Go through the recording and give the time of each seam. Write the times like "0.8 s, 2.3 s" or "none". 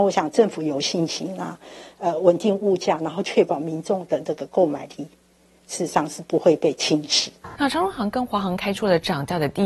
7.6 s